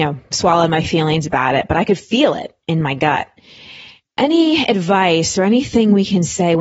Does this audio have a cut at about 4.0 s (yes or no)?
no